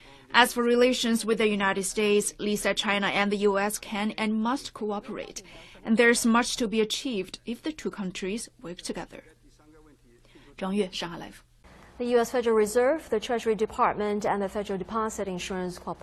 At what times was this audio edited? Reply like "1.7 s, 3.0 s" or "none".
none